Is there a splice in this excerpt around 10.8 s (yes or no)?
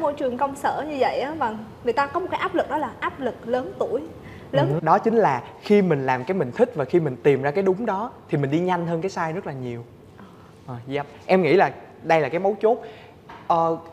no